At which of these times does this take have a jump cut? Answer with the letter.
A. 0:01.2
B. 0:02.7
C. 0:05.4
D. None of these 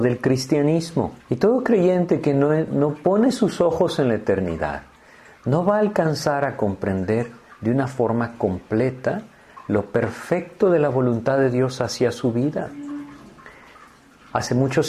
A